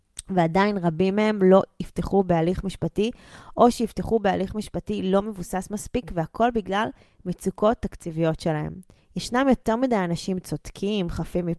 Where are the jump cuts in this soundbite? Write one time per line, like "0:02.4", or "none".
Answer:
0:09.0